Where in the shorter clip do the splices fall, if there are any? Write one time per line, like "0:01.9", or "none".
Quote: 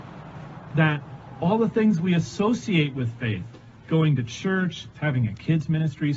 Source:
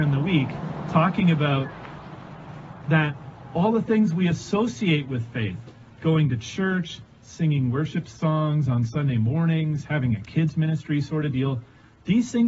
0:04.9